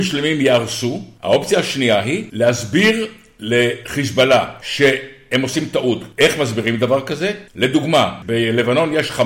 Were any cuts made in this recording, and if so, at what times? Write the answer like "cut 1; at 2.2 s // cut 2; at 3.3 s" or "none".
none